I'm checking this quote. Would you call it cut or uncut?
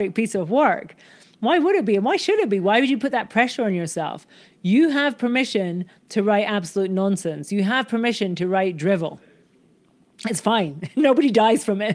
uncut